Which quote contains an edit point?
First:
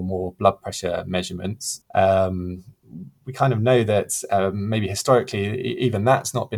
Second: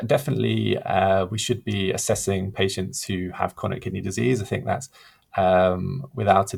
first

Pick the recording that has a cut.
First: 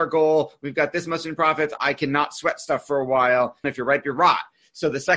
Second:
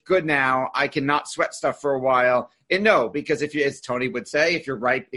first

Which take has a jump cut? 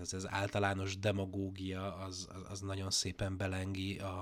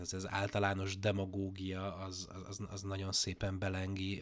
first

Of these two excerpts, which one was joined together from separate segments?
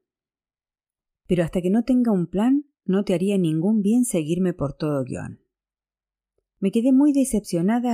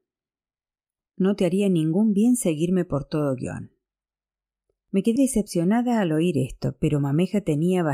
second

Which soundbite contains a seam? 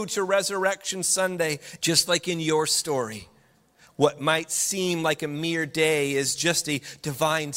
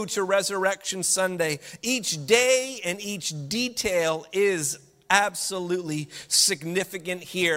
first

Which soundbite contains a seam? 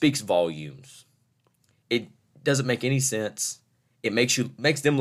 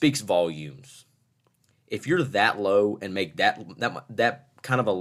first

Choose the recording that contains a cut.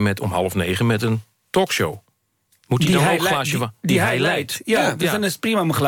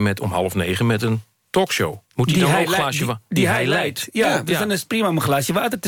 second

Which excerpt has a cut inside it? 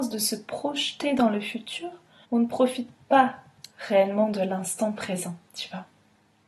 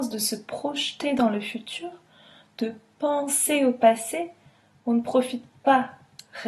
first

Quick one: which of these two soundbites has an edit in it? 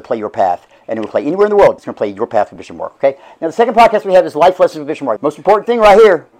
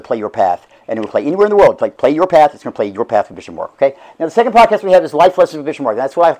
first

